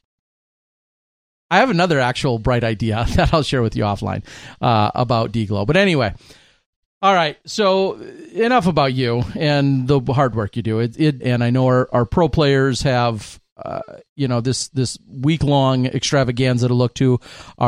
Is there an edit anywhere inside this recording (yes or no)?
yes